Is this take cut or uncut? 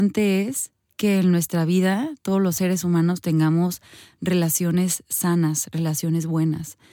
uncut